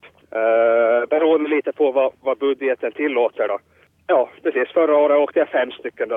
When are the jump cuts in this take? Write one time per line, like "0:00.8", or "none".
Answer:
none